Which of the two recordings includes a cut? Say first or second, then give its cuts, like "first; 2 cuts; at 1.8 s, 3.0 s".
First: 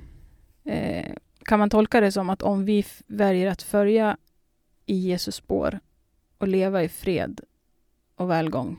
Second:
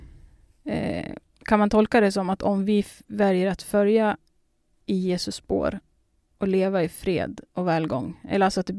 second; 1 cut; at 7.5 s